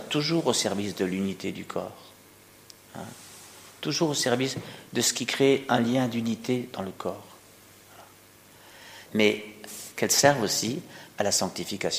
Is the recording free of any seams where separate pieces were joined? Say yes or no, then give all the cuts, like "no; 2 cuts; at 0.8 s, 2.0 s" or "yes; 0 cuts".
no; 1 cut; at 9.1 s